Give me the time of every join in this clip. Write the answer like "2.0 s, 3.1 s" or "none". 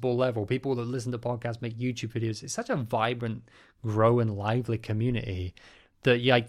1.6 s